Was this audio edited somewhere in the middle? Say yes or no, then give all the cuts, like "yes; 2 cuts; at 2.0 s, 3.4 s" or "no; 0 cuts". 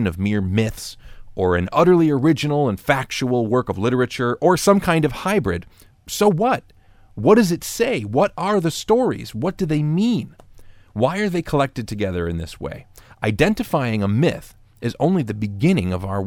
no; 0 cuts